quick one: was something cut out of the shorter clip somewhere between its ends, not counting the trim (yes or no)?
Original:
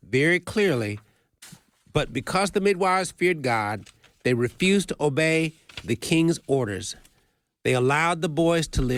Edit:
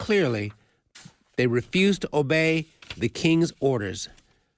yes